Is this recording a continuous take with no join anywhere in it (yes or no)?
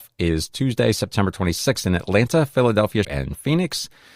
no